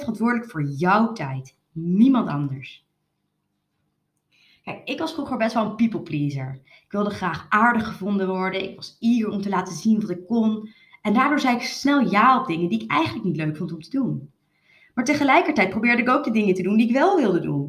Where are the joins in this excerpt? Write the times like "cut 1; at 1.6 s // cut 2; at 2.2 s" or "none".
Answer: none